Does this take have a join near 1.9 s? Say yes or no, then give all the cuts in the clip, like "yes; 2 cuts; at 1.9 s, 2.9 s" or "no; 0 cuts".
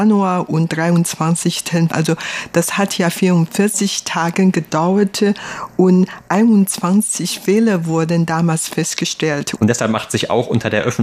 yes; 2 cuts; at 1.9 s, 9.6 s